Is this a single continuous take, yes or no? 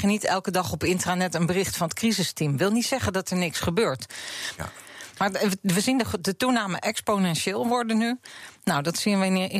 no